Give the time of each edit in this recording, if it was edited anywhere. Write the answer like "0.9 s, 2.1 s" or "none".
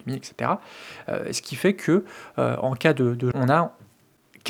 3.3 s